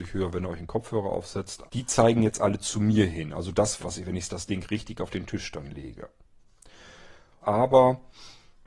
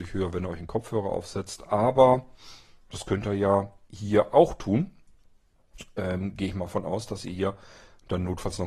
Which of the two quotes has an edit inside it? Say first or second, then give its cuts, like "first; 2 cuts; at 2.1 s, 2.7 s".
first; 3 cuts; at 1.7 s, 3.8 s, 7.4 s